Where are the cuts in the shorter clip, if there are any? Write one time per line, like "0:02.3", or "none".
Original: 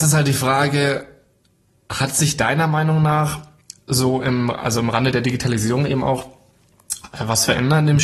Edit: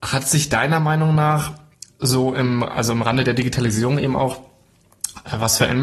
none